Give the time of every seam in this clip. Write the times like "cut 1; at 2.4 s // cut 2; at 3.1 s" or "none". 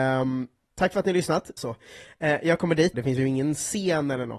cut 1; at 1.6 s // cut 2; at 2.9 s